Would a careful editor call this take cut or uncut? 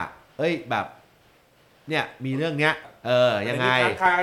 cut